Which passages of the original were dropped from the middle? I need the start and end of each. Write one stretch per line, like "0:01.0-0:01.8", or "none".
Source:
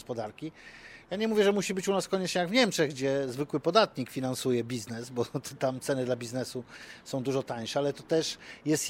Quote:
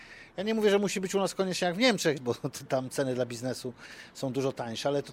0:02.9-0:05.1